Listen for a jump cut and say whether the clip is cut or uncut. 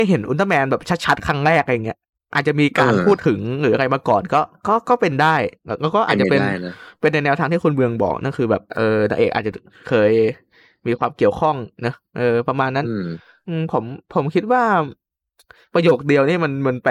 cut